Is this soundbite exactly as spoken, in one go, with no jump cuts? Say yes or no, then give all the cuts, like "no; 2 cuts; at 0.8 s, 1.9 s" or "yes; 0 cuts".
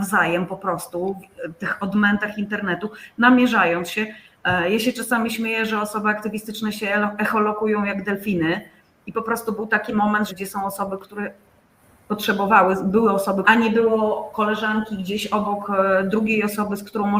no; 2 cuts; at 10.3 s, 13.4 s